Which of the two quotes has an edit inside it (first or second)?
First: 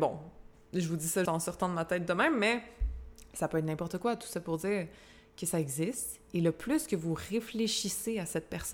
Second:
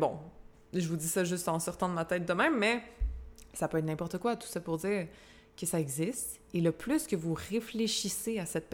first